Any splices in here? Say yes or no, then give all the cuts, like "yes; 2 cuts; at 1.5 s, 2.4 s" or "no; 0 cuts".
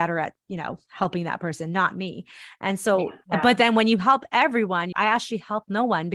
yes; 2 cuts; at 3.2 s, 4.9 s